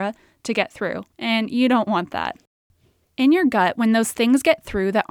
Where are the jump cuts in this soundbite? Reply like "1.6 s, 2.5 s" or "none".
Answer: 1.1 s